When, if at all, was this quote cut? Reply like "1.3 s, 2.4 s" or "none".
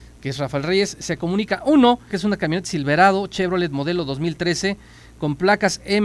2.1 s